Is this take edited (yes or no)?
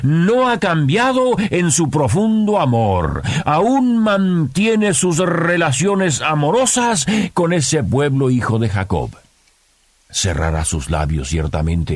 no